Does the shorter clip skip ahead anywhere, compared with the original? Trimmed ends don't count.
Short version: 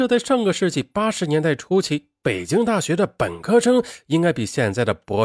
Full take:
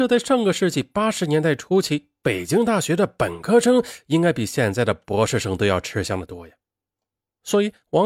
no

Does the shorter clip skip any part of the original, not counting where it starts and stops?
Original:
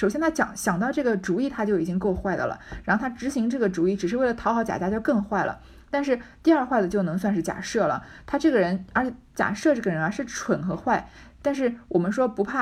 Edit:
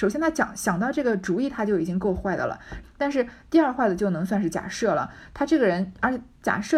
yes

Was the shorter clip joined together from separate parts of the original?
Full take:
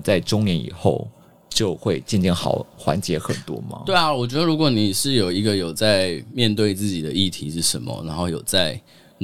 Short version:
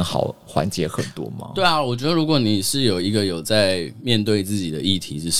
no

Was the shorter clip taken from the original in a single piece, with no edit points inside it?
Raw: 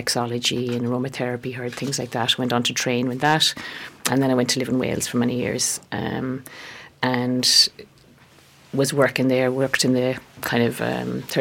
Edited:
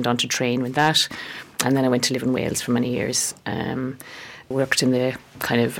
no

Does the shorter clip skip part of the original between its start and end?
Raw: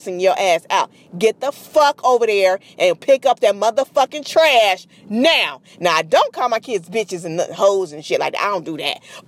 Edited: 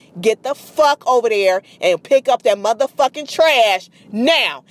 no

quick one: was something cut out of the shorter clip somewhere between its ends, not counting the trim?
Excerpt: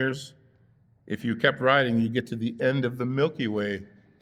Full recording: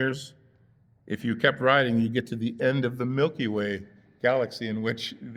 no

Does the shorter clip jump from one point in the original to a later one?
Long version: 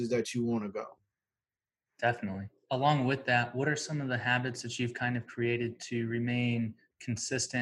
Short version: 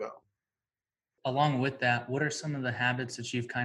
yes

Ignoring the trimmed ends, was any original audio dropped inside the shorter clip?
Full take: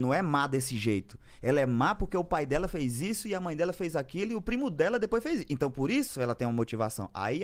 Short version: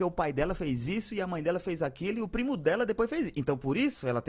no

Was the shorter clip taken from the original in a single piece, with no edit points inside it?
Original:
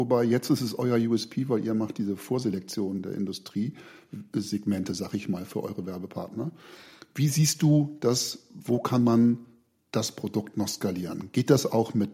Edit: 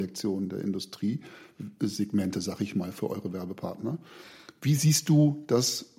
yes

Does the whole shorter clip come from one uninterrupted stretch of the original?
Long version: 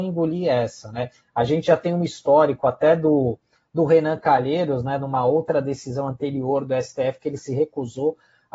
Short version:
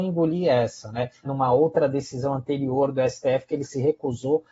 no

